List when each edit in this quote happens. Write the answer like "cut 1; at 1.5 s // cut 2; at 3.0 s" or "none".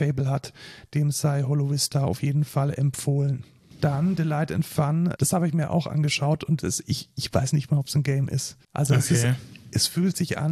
cut 1; at 3.7 s // cut 2; at 5.2 s // cut 3; at 8.6 s